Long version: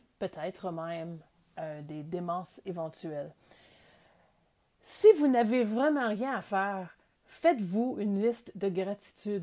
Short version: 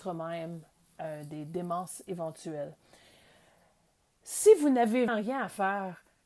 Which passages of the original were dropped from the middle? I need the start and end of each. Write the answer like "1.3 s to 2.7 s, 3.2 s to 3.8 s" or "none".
5.7 s to 6.0 s